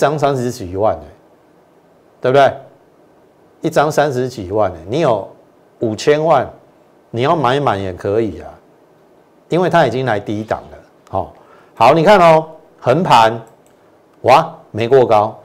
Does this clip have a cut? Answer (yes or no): no